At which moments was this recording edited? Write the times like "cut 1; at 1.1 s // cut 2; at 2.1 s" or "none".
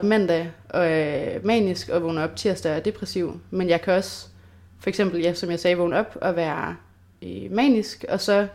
none